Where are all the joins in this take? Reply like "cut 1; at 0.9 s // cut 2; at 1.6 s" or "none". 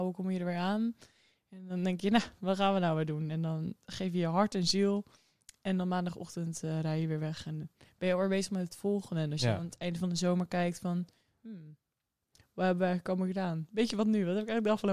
none